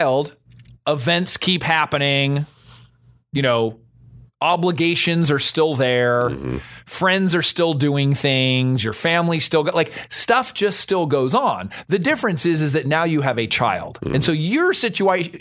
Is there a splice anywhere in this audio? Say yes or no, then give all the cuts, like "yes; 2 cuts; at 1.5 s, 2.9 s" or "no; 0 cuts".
no; 0 cuts